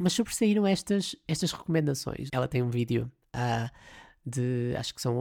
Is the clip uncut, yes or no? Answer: no